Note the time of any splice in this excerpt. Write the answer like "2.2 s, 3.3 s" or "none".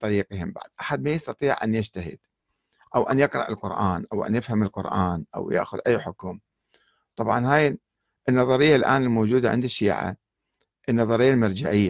none